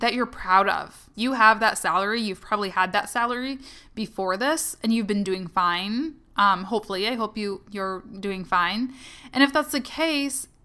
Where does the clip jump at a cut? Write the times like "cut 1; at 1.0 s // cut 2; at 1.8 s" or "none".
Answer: cut 1; at 1.1 s